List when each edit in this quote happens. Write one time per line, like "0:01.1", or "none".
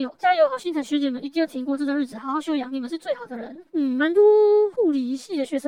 0:03.7